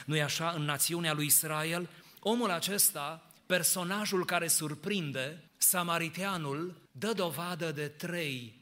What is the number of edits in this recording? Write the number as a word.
two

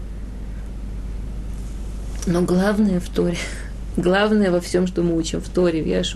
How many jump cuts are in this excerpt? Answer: zero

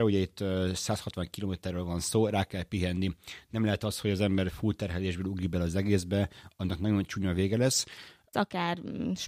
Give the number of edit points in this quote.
one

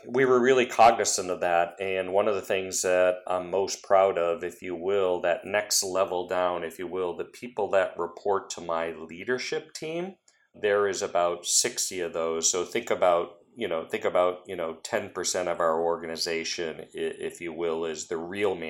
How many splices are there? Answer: zero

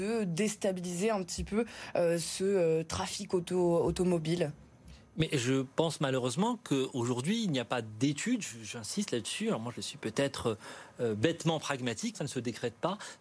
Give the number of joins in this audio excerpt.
one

